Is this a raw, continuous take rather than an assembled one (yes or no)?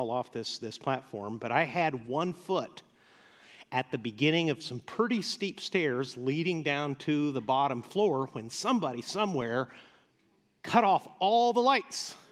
yes